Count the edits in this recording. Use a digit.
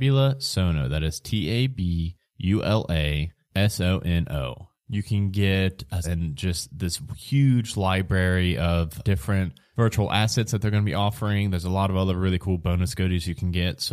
3